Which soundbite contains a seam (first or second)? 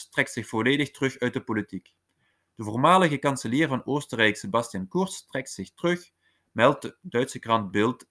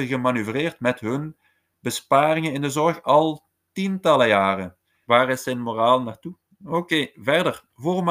second